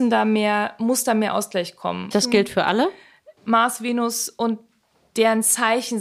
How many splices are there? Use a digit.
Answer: 2